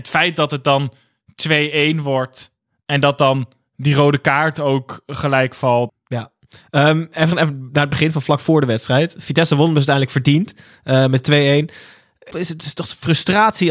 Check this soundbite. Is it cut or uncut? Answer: cut